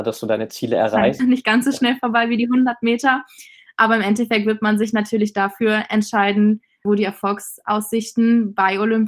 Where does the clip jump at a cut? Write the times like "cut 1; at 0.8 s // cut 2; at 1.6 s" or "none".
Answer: cut 1; at 1.2 s // cut 2; at 6.8 s